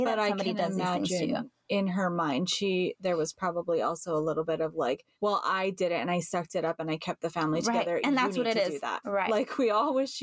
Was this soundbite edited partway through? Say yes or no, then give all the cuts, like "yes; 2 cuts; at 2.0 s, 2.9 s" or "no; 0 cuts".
yes; 2 cuts; at 5.1 s, 9.0 s